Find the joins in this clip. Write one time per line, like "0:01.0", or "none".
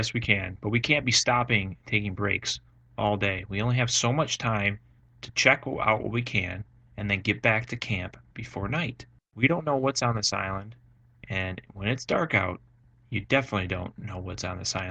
none